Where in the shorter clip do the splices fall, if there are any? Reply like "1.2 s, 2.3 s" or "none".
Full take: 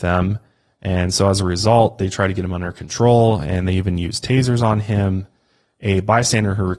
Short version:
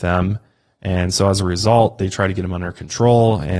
none